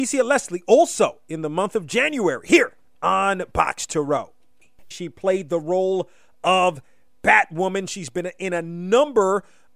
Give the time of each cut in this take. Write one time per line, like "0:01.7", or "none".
0:04.9

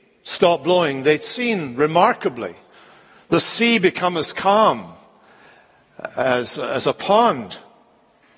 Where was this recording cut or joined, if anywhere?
none

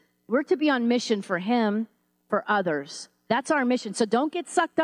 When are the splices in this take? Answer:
none

